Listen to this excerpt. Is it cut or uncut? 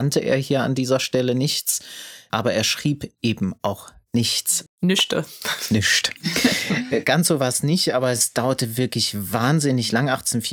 cut